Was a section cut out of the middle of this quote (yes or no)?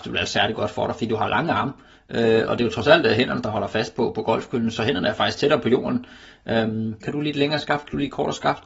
yes